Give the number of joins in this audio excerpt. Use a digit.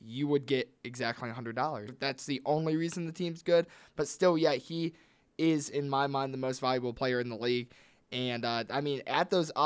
1